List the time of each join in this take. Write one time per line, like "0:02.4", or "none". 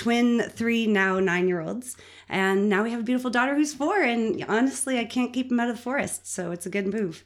none